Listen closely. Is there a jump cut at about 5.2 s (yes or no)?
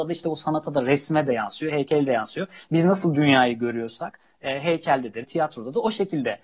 yes